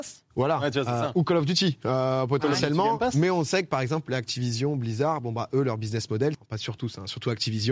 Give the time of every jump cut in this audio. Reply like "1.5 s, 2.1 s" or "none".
6.3 s